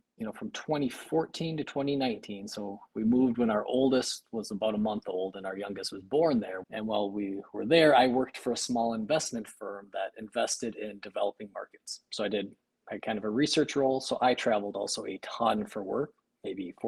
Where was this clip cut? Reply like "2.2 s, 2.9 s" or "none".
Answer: 6.6 s